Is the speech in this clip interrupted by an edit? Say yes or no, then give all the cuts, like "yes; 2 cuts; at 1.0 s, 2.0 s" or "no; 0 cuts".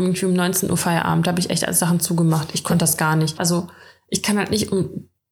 yes; 1 cut; at 3.4 s